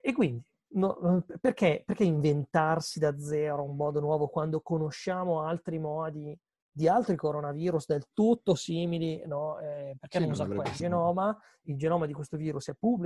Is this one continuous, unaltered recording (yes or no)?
no